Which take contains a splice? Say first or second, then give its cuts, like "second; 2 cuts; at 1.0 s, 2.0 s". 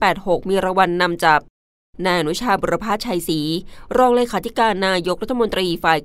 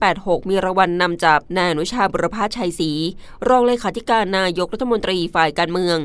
second; 1 cut; at 1.5 s